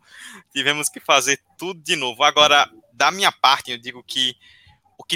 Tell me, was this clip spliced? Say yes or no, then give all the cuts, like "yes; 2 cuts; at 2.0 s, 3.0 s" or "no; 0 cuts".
yes; 1 cut; at 3.7 s